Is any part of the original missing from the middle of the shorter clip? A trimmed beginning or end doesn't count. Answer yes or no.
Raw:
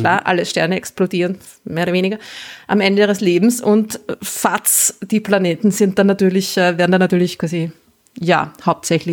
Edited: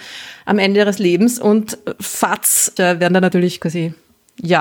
yes